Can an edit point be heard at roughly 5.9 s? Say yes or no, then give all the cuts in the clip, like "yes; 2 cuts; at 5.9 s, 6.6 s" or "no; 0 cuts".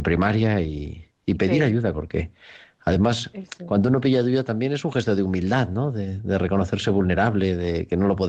no; 1 cut; at 1.9 s